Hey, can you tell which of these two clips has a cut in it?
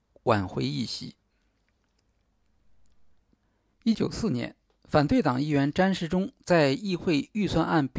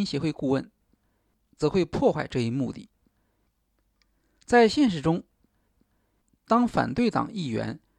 first; 1 cut; at 3.9 s

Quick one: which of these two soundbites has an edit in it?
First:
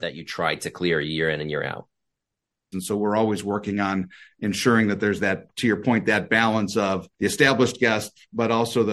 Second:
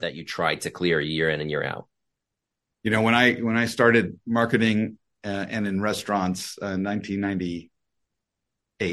first; 2 cuts; at 2.7 s, 7.1 s

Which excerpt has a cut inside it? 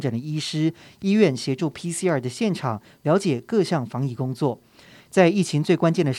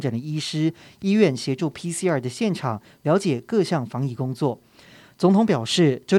first; 1 cut; at 5.0 s

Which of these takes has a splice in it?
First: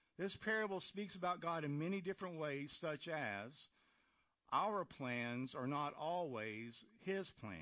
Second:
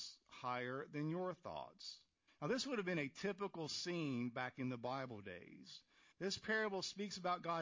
second; 2 cuts; at 2.3 s, 6.1 s

